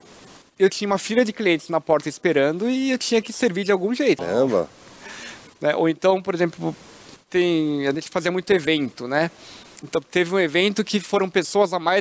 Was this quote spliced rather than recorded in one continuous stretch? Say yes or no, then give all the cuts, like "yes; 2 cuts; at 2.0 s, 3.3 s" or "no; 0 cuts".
yes; 2 cuts; at 4.2 s, 5.6 s